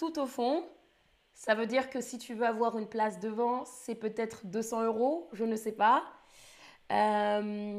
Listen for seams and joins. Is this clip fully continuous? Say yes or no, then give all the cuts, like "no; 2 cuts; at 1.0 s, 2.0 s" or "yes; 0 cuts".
yes; 0 cuts